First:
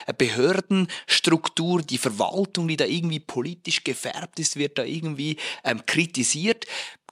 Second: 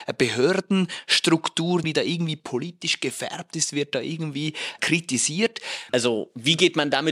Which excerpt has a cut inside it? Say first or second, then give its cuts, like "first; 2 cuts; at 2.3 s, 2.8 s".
second; 3 cuts; at 1.8 s, 4.8 s, 5.9 s